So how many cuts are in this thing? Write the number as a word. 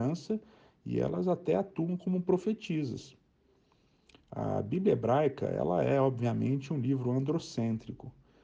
zero